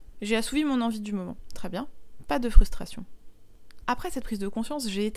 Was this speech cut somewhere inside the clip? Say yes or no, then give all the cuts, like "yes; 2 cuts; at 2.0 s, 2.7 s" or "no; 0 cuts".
yes; 1 cut; at 3.8 s